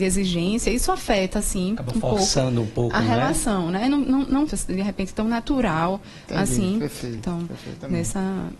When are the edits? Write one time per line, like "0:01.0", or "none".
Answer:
0:04.5
0:07.2

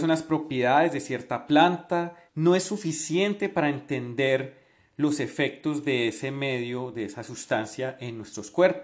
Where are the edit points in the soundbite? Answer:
0:02.3

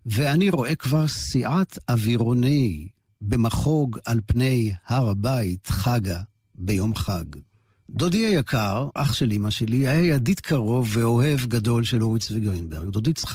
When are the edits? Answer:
0:07.8
0:09.0

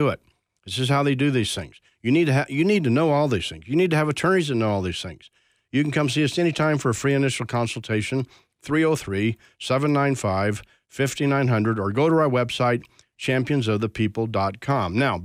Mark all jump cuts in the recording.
none

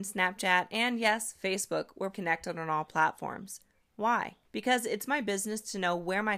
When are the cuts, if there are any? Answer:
0:02.1
0:04.4

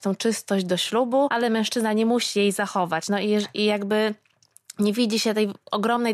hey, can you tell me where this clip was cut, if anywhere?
none

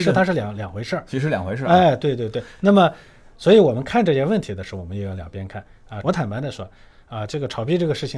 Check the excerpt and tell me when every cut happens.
0:06.0

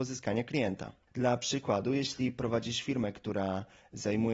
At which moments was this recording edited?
0:01.1

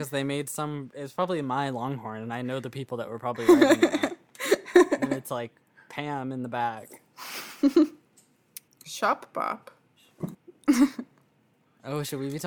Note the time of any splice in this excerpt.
0:08.7
0:10.3

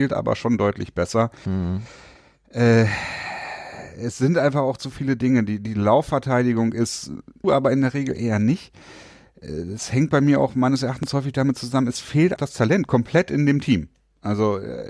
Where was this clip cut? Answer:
0:07.4
0:12.4

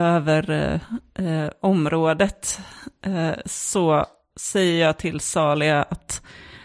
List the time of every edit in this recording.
none

